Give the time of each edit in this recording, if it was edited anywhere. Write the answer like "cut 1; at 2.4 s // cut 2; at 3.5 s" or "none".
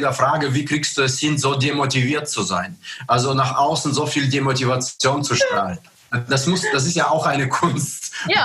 none